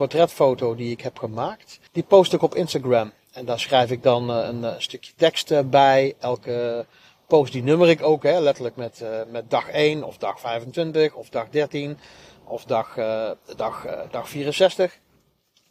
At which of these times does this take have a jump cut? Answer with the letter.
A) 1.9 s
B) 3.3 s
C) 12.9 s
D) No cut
A